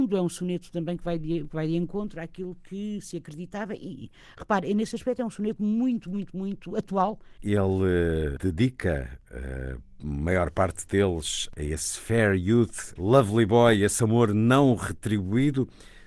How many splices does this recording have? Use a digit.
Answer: 2